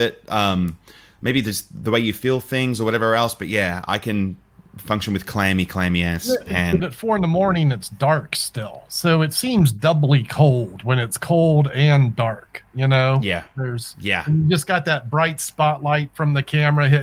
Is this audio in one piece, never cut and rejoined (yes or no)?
no